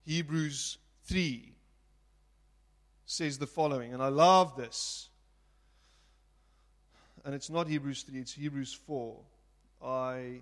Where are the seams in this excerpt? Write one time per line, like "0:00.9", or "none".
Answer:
none